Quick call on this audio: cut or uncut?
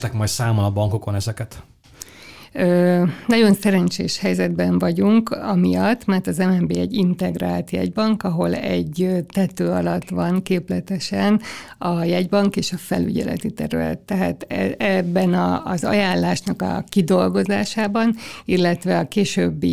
uncut